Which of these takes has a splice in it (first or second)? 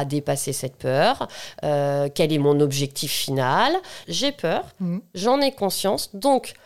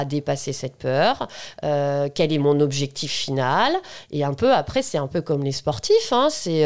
first